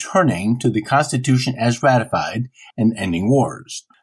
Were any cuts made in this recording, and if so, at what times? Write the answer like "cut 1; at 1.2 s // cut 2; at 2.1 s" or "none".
cut 1; at 2.7 s

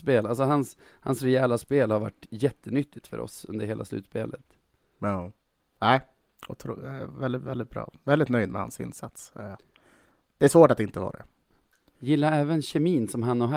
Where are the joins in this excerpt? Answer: none

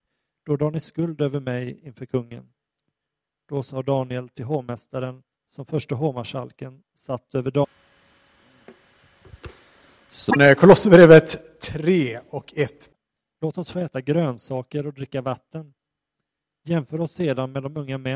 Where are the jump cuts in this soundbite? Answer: none

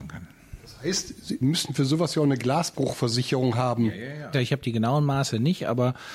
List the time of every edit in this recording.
cut 1; at 4.3 s

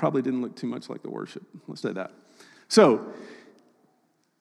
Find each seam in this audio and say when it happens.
cut 1; at 1.8 s

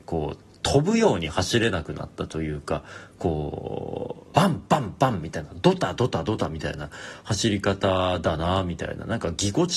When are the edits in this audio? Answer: cut 1; at 4.3 s

